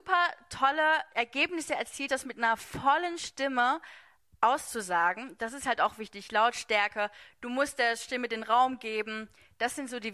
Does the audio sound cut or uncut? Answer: cut